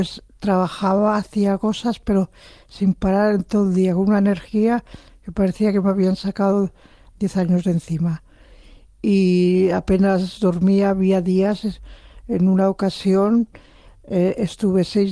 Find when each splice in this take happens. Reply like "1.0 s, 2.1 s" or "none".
none